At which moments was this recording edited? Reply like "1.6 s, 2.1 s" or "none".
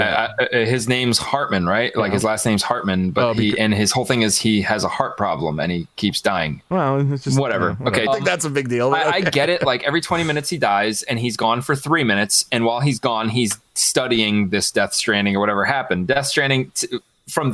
8.1 s